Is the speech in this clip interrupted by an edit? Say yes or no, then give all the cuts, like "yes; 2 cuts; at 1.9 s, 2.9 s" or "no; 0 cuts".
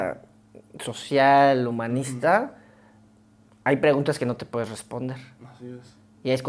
no; 0 cuts